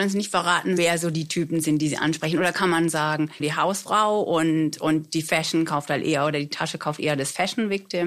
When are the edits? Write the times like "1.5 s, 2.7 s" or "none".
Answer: 3.4 s